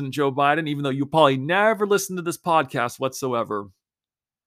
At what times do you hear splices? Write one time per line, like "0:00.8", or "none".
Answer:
none